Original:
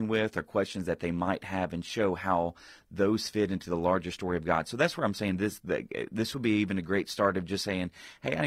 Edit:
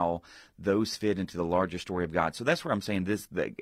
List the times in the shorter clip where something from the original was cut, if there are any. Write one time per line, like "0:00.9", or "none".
none